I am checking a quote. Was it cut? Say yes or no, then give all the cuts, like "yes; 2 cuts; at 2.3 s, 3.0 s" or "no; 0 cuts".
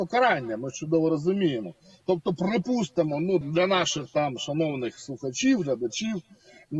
yes; 1 cut; at 3.4 s